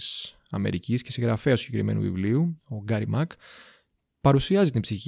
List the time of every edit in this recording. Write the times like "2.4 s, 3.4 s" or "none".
none

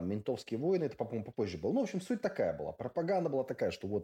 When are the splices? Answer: none

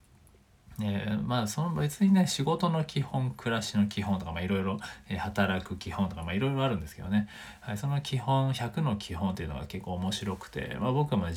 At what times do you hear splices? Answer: none

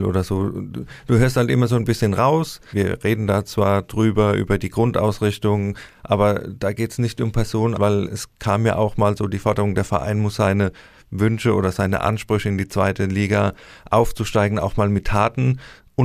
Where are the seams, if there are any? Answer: 2.7 s, 7.7 s

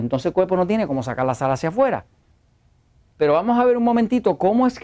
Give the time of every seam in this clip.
3.1 s

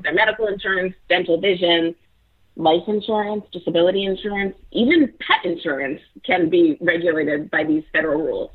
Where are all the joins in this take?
none

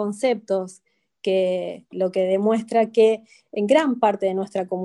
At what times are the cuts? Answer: 1.9 s

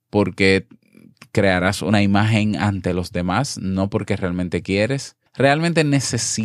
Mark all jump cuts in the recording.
5.3 s

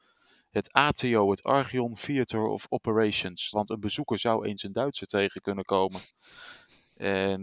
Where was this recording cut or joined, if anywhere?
3.5 s

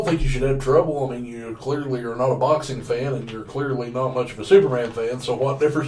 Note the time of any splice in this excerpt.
none

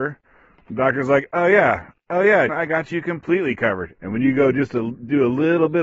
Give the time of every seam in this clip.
2.5 s, 4.0 s

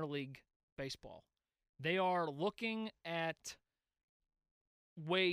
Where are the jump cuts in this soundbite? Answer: none

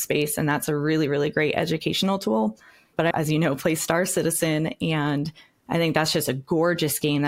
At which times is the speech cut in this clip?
3.1 s

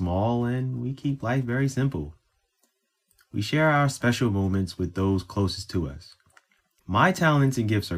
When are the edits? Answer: 6.8 s

